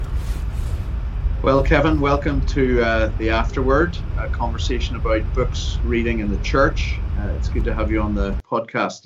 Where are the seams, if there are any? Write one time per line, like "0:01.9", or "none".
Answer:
none

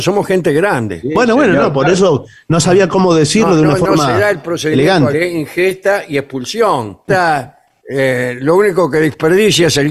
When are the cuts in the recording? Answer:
0:05.1
0:07.1

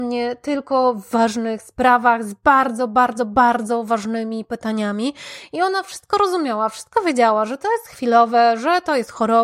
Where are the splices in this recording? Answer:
none

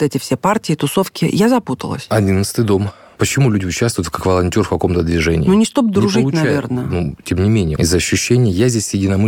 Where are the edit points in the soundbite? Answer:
0:07.8

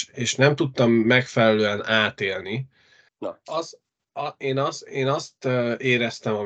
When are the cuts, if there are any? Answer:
0:03.1

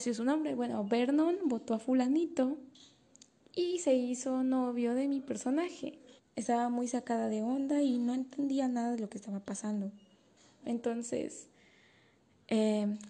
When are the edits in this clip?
0:06.2
0:10.6

